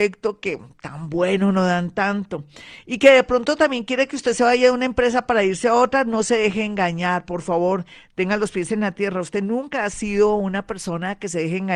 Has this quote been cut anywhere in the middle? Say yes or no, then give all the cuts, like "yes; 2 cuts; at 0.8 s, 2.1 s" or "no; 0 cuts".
no; 0 cuts